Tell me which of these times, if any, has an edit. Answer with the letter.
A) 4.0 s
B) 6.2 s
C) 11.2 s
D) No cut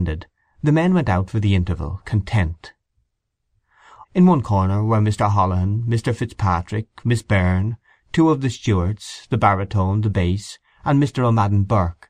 A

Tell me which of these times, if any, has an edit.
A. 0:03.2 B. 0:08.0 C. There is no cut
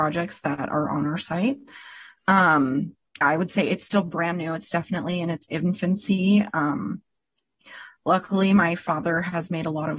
A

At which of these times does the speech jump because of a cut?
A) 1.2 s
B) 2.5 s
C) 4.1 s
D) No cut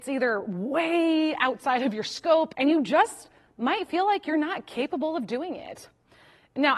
B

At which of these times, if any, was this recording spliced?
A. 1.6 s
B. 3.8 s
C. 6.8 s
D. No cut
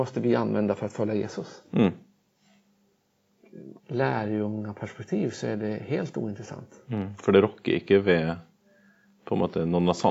B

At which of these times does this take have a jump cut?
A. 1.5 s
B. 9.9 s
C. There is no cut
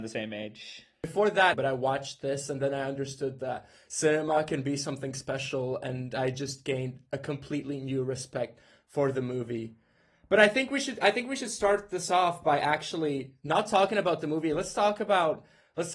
A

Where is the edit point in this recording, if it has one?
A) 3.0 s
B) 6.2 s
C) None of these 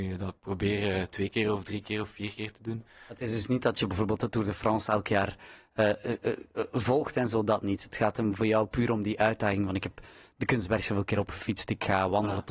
C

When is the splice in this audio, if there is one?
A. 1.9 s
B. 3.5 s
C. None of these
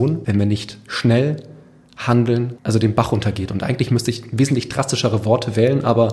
C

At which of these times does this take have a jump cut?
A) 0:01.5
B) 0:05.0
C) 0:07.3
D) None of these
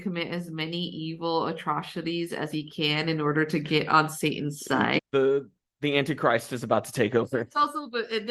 B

